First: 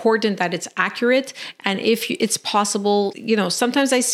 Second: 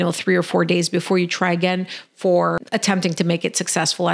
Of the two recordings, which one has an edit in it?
first; 1 cut; at 3.1 s

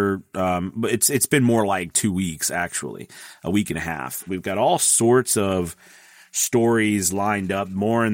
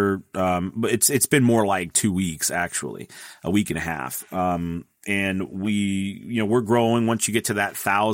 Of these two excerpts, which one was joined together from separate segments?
first; 1 cut; at 4.3 s

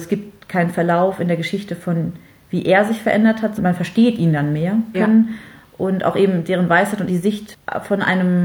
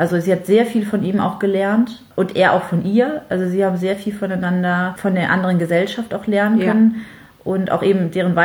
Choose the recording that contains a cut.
first; 3 cuts; at 3.6 s, 4.9 s, 7.1 s

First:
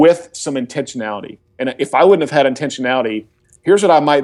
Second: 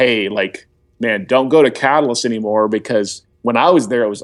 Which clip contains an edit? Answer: second; 1 cut; at 3.3 s

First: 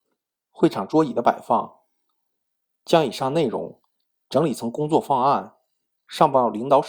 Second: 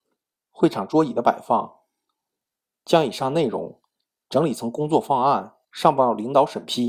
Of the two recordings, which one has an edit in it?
second; 1 cut; at 5.6 s

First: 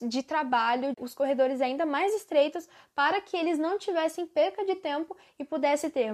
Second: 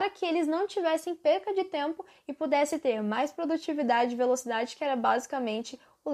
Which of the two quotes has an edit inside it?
first; 1 cut; at 0.9 s

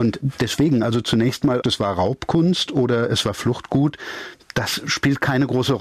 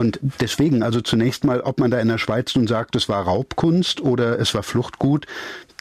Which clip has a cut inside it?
first; 1 cut; at 1.6 s

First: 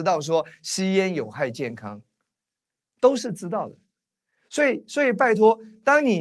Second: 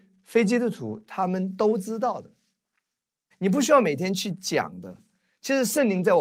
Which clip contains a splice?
second; 1 cut; at 3.3 s

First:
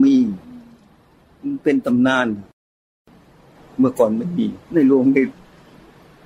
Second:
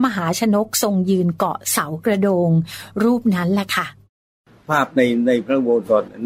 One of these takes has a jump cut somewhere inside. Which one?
first; 1 cut; at 4.6 s

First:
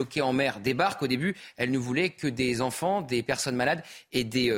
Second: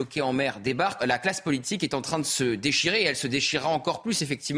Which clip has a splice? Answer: second; 1 cut; at 1.0 s

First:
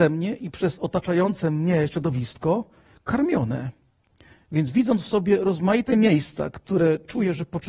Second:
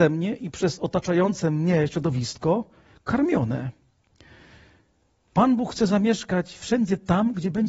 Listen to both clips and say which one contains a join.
first; 1 cut; at 4.3 s

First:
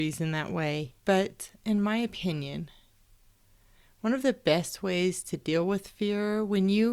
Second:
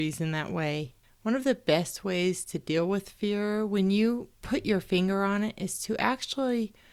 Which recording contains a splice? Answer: second; 2 cuts; at 1.0 s, 4.3 s

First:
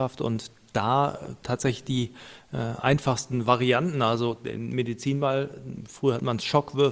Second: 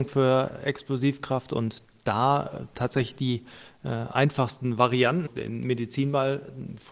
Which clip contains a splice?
second; 1 cut; at 5.3 s

